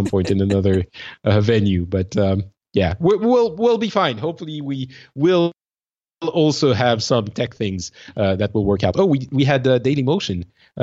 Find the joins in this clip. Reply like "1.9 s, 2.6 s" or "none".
none